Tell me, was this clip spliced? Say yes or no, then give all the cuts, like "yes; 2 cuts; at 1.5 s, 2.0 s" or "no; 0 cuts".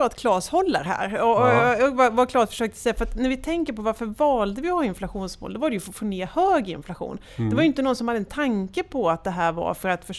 no; 0 cuts